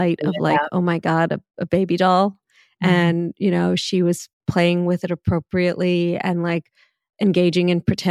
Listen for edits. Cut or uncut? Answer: uncut